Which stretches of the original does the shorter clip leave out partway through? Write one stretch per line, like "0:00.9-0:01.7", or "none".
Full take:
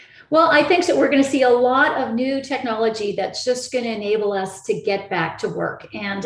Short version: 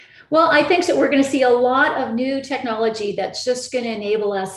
none